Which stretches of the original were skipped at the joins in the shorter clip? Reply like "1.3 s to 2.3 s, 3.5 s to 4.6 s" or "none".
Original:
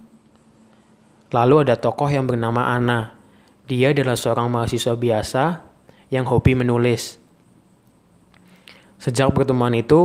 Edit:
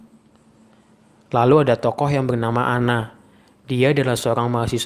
none